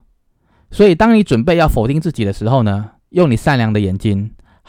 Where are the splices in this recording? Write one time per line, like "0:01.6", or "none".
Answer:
0:03.1